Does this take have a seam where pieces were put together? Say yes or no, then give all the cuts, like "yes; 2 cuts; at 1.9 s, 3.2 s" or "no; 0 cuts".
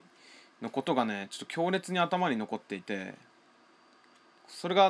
no; 0 cuts